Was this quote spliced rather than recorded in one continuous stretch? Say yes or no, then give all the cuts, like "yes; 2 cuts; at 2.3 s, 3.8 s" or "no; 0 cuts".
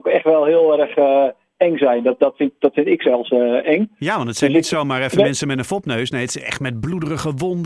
no; 0 cuts